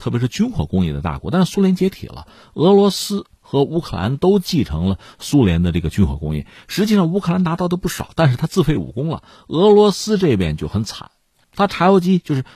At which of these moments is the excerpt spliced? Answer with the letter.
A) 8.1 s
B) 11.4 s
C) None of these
B